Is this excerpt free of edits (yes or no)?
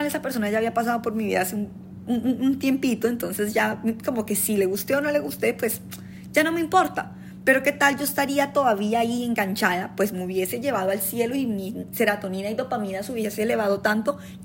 yes